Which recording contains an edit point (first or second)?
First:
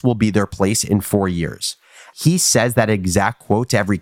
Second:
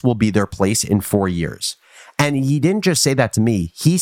first